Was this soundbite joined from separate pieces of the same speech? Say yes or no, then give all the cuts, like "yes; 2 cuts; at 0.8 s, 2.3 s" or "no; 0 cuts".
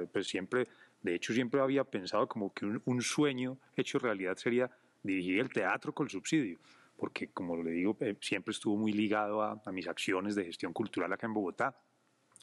no; 0 cuts